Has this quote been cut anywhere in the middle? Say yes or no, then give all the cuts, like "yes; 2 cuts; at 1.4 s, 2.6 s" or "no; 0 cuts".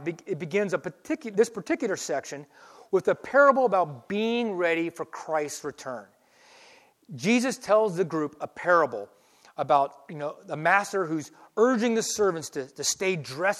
no; 0 cuts